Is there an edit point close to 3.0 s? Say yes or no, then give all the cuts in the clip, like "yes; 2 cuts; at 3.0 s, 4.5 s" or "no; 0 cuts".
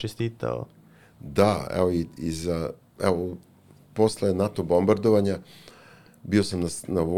yes; 1 cut; at 3.0 s